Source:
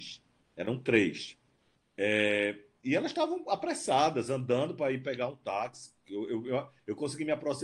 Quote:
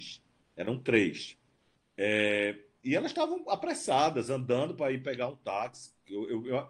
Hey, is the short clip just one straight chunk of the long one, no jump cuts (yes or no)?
yes